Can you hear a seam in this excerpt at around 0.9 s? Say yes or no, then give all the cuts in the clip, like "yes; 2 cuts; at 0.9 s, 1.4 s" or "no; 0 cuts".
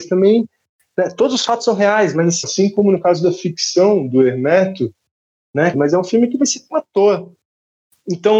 no; 2 cuts; at 2.4 s, 5.7 s